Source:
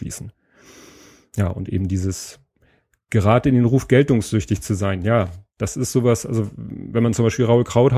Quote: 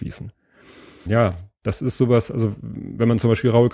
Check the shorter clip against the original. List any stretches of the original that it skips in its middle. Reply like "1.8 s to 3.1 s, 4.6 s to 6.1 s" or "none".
1.1 s to 5.0 s